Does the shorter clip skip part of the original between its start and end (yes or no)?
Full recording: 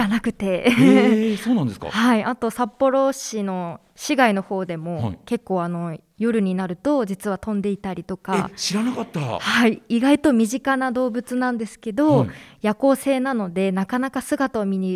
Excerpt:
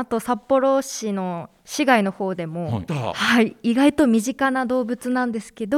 yes